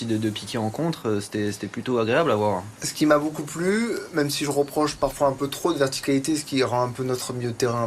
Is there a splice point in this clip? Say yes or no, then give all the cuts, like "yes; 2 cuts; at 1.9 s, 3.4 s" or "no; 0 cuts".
no; 0 cuts